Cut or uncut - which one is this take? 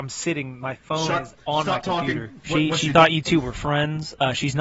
cut